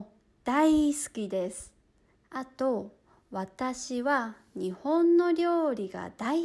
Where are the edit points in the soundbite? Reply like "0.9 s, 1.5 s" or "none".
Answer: 2.2 s